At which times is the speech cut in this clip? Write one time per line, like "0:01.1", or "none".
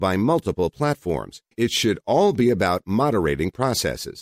0:01.5